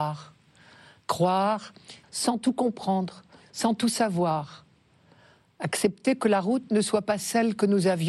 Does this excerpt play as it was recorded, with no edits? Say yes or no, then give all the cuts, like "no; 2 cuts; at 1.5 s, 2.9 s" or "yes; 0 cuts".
no; 1 cut; at 2.0 s